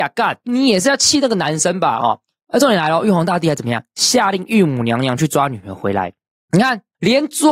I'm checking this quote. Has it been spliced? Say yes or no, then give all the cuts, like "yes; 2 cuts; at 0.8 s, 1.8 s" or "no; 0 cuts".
no; 0 cuts